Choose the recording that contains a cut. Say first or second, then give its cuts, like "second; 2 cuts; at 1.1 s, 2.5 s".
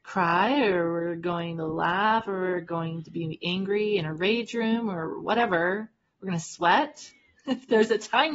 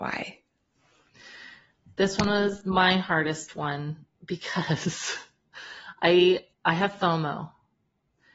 second; 2 cuts; at 4.1 s, 6.5 s